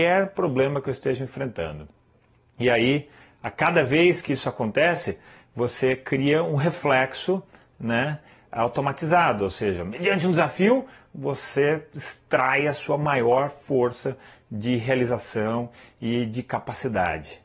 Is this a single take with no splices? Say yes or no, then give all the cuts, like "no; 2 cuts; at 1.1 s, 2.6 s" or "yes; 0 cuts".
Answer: yes; 0 cuts